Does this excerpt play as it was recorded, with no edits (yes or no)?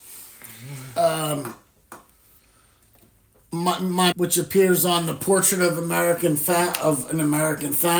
no